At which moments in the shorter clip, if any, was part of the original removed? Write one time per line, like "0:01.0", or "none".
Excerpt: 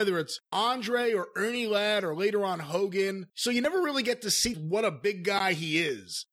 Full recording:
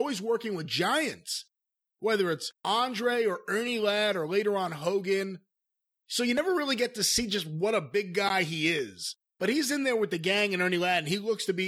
0:03.3
0:04.5